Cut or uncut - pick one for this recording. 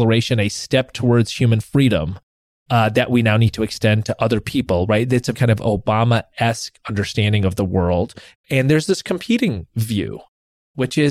cut